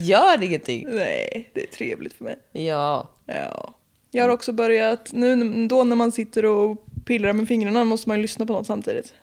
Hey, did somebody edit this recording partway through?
no; 0 cuts

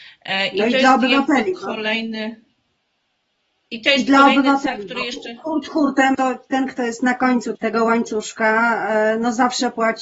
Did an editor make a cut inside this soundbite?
yes; 2 cuts; at 6.1 s, 7.6 s

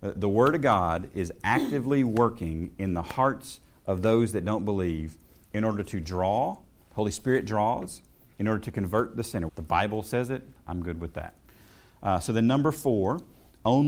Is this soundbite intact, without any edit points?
no; 1 cut; at 9.5 s

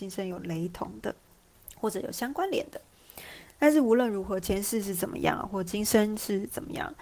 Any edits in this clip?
no; 0 cuts

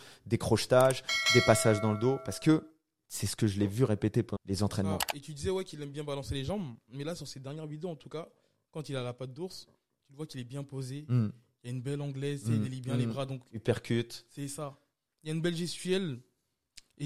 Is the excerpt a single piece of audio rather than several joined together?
no; 1 cut; at 4.4 s

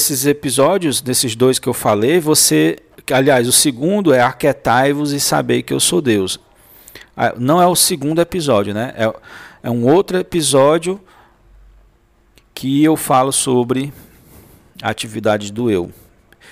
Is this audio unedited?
yes; 0 cuts

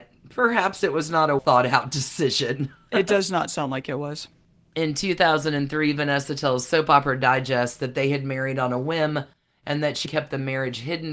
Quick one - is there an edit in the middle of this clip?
yes; 2 cuts; at 1.4 s, 10.1 s

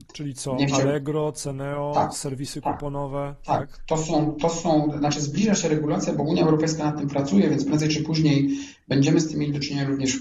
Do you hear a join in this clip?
no; 0 cuts

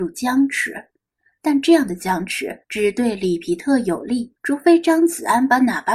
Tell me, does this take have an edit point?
yes; 2 cuts; at 2.6 s, 4.4 s

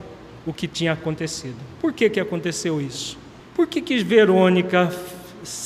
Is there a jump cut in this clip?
yes; 1 cut; at 3.4 s

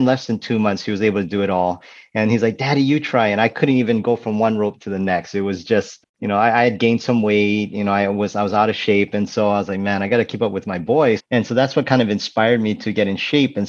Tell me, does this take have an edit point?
yes; 2 cuts; at 6.0 s, 11.2 s

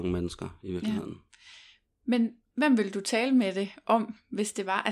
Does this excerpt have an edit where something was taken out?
yes; 1 cut; at 2.5 s

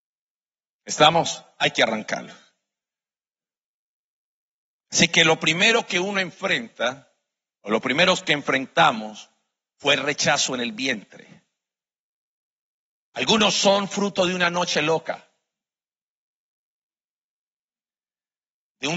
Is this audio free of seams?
yes; 0 cuts

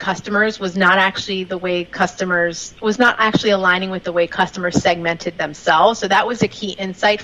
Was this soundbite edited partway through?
no; 0 cuts

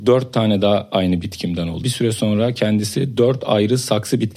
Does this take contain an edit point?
yes; 1 cut; at 1.8 s

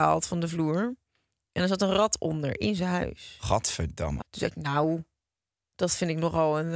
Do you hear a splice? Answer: yes; 1 cut; at 4.2 s

